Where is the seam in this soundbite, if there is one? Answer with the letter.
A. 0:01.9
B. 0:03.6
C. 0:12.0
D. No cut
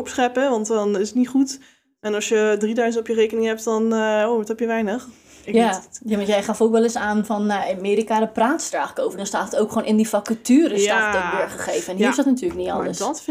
D